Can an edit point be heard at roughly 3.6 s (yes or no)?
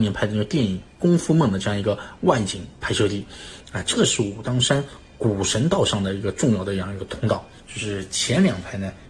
yes